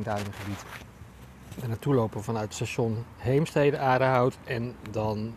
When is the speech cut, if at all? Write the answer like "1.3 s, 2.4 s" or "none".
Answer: none